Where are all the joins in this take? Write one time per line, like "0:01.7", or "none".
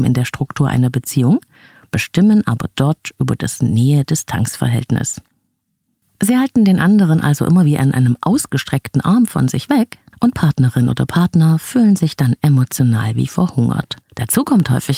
0:14.0